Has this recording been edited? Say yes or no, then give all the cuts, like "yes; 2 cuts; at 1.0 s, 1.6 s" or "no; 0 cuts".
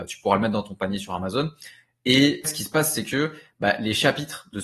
yes; 1 cut; at 2.4 s